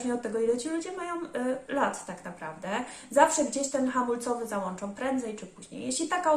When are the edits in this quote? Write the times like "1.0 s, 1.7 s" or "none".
none